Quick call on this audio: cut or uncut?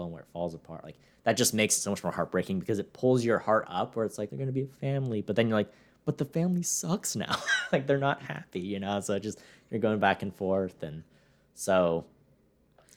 cut